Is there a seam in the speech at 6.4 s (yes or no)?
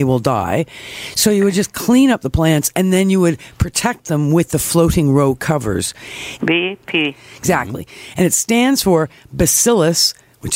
yes